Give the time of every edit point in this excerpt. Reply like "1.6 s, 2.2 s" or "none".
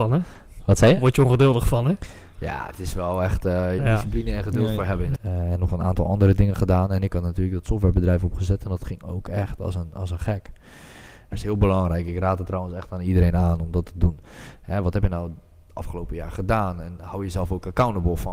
3.8 s, 5.1 s, 11.3 s